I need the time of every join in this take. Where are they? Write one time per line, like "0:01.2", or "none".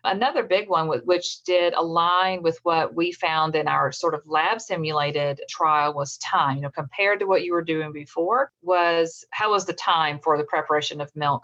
none

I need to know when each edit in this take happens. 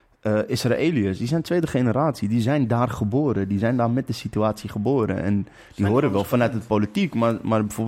none

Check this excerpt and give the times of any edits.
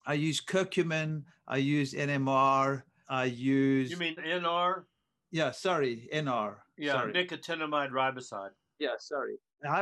none

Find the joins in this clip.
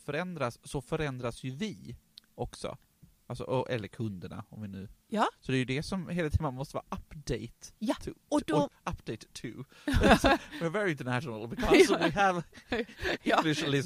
0:08.2

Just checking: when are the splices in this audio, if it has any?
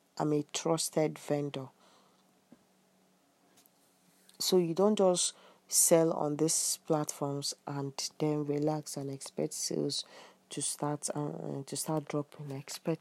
none

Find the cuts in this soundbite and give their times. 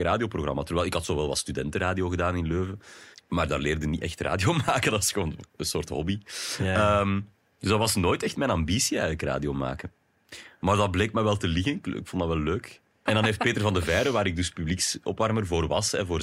0:03.1
0:13.1

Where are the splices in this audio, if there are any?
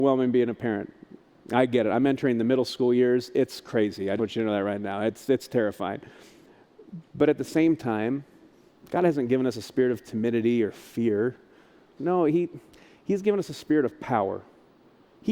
0:04.2
0:12.0

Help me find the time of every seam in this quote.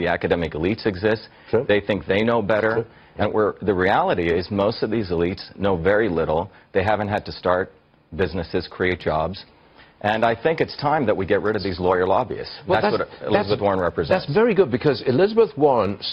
none

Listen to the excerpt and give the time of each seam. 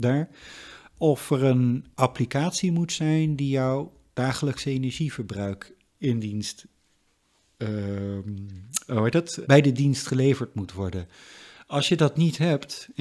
0:01.9
0:09.4

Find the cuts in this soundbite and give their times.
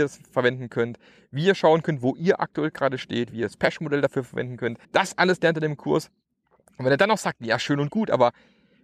0:04.8

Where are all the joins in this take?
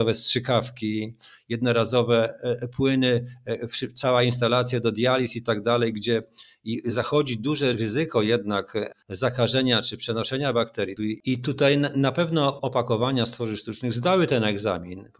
0:11.0

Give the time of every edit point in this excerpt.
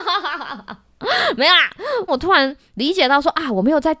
0:02.1

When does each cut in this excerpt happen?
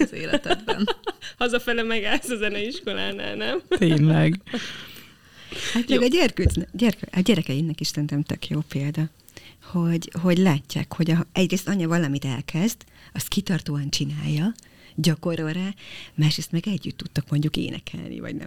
none

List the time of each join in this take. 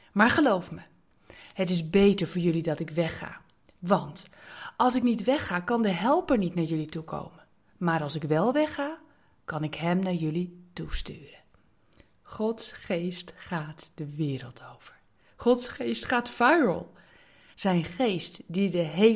0:17.5

